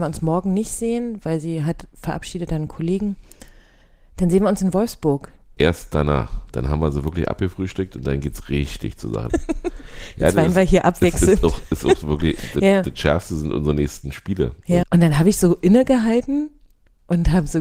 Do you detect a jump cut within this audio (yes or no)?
yes